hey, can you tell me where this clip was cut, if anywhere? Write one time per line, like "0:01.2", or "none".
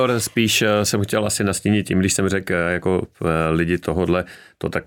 none